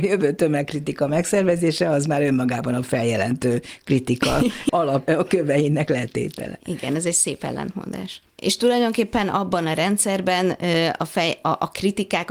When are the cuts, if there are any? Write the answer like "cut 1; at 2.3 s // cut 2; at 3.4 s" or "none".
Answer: cut 1; at 8.3 s